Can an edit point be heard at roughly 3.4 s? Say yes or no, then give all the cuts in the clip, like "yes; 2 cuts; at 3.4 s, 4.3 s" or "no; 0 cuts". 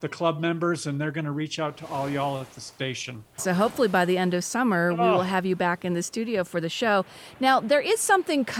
yes; 1 cut; at 3.4 s